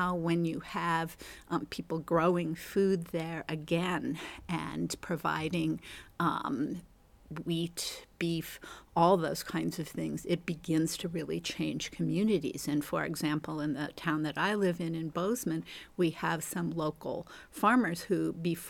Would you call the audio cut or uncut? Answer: uncut